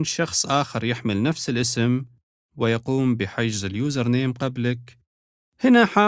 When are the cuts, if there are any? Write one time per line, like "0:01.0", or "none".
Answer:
none